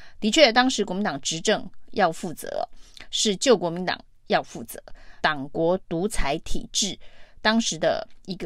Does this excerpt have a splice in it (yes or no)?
yes